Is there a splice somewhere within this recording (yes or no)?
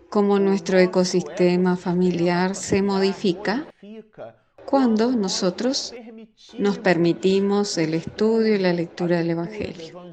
no